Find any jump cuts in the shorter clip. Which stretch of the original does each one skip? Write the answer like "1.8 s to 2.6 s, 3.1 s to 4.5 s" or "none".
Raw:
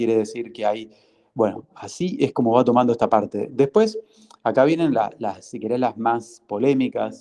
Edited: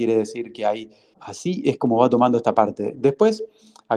1.1 s to 1.7 s